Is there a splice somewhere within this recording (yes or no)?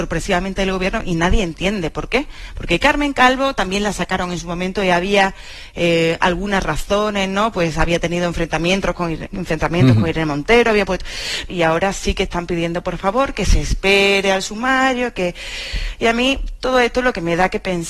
yes